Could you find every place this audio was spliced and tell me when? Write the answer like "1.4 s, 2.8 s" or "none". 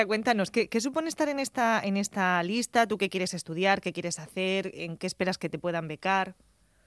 none